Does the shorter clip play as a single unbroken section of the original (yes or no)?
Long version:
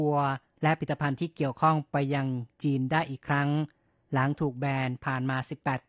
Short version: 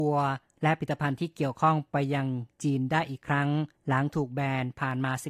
no